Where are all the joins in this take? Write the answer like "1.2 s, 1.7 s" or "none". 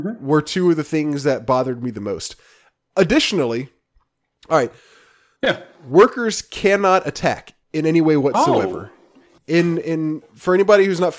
5.4 s, 7.6 s

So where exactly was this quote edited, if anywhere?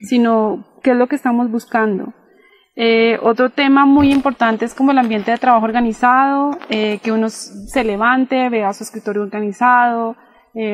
none

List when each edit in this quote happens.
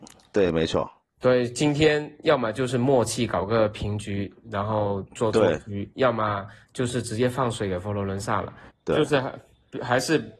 8.7 s

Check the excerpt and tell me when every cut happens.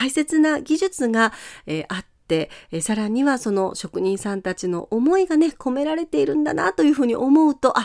none

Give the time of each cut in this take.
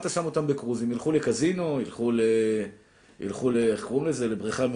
none

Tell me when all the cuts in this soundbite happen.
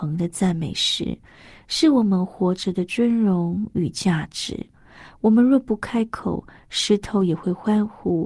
none

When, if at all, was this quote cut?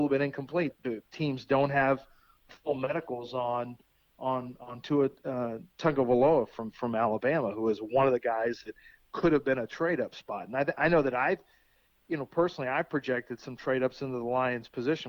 6.5 s

